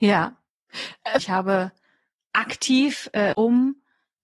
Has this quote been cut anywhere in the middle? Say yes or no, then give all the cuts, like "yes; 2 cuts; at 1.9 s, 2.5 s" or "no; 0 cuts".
yes; 2 cuts; at 1.2 s, 3.3 s